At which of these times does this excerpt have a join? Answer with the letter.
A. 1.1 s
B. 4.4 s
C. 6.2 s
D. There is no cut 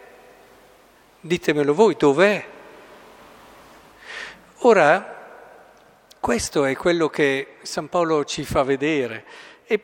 D